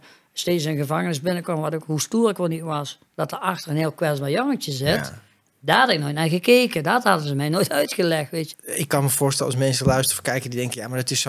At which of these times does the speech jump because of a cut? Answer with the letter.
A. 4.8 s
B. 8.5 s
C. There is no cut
B